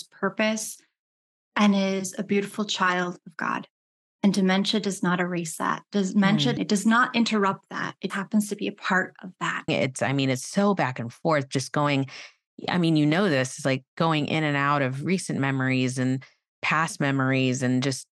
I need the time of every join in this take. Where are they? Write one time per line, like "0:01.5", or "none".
0:06.6
0:08.1
0:09.7